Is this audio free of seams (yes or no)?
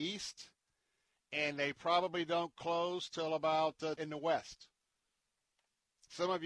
no